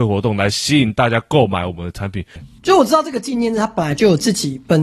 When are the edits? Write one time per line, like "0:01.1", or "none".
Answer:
0:02.4